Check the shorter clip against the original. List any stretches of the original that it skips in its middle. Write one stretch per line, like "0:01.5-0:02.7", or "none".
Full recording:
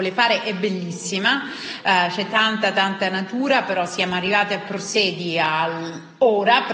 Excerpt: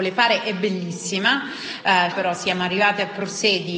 0:02.1-0:03.6